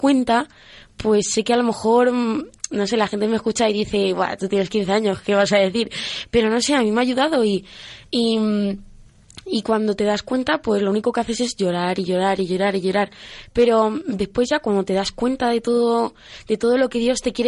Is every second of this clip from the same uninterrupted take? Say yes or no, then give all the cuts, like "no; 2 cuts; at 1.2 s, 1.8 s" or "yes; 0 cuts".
yes; 0 cuts